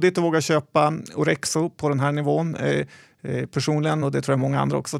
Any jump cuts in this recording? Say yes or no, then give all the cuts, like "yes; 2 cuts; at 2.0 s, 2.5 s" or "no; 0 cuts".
no; 0 cuts